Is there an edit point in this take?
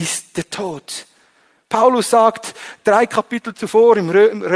no; 0 cuts

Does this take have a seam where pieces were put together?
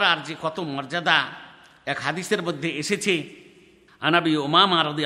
no; 0 cuts

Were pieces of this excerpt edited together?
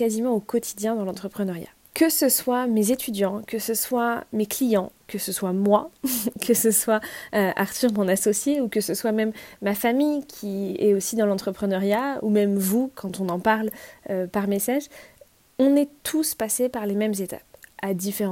no; 0 cuts

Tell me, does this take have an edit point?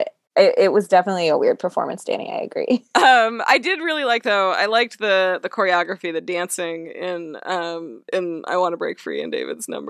no; 0 cuts

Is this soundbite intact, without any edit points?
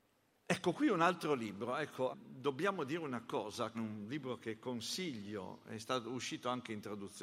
no; 2 cuts; at 2.1 s, 3.7 s

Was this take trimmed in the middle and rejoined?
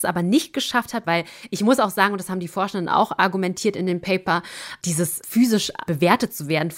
yes; 1 cut; at 1.0 s

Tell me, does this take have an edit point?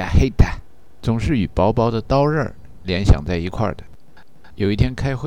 yes; 1 cut; at 1.0 s

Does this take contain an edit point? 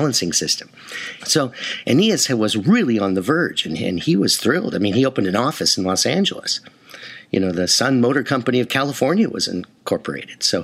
yes; 1 cut; at 1.2 s

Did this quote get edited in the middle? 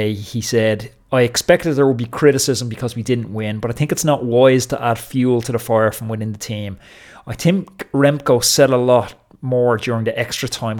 no; 0 cuts

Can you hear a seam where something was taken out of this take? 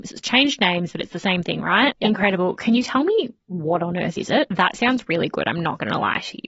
yes; 2 cuts; at 1.9 s, 4.5 s

